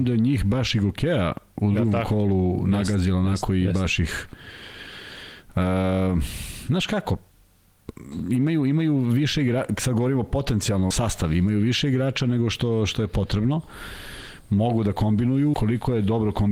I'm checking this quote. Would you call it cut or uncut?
cut